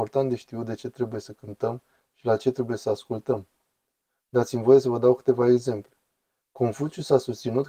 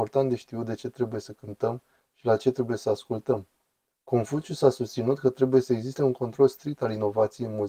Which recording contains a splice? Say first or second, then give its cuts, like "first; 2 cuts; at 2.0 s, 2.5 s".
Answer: second; 1 cut; at 3.9 s